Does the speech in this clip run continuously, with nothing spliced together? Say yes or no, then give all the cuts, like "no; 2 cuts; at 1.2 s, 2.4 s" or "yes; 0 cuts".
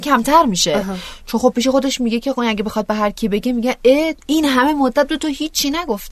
yes; 0 cuts